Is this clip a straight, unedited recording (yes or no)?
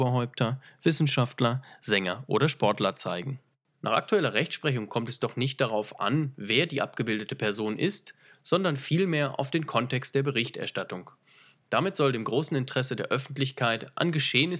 yes